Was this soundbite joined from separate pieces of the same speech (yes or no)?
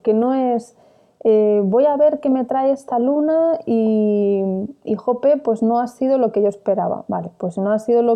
no